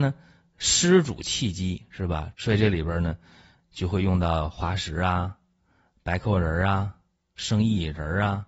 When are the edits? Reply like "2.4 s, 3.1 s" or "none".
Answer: 2.3 s